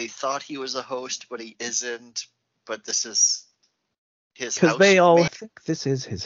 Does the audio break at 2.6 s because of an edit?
no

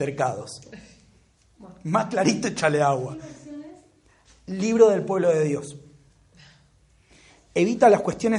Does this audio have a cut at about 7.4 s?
no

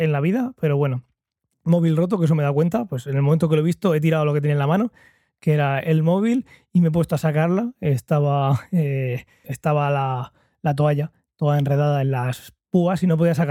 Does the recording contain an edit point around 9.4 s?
yes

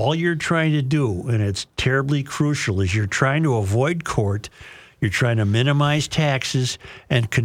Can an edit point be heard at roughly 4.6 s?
no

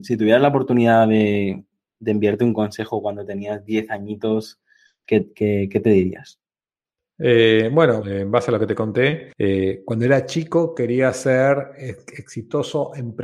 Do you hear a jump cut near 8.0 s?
yes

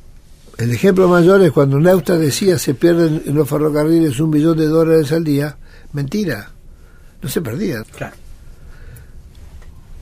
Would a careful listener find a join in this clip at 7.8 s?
yes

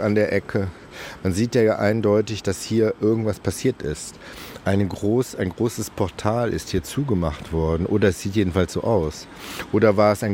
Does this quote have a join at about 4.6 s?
no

